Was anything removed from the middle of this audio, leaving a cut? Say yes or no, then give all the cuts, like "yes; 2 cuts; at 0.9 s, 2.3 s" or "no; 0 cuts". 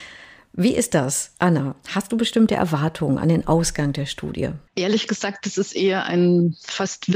yes; 1 cut; at 4.7 s